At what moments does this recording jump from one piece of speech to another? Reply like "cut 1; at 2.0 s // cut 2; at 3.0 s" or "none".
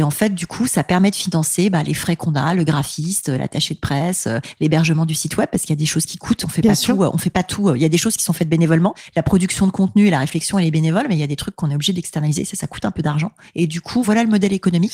none